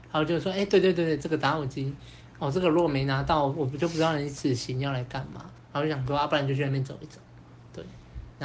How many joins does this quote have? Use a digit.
1